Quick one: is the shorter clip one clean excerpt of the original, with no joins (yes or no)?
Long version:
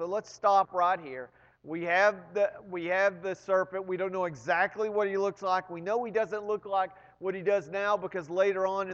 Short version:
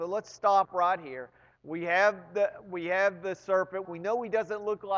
no